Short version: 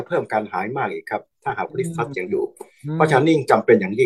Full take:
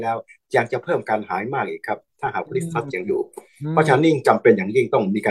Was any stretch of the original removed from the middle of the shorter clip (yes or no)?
no